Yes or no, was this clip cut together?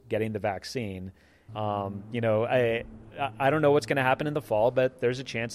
yes